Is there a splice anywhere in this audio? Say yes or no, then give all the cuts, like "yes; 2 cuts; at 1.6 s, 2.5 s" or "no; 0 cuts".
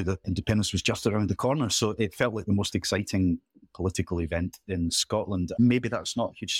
yes; 1 cut; at 5.6 s